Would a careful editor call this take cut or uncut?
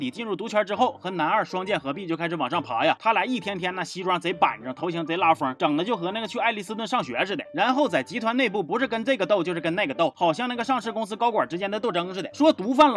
uncut